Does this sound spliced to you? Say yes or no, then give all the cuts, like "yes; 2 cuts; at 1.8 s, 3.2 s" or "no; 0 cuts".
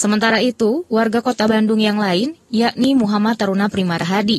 no; 0 cuts